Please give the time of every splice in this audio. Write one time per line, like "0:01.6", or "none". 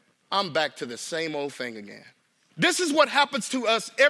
0:02.5